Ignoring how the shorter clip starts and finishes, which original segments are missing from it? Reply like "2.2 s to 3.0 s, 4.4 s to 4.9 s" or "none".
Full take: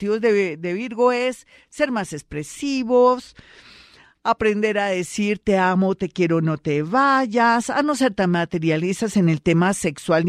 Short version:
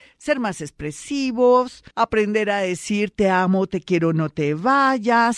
3.4 s to 4.2 s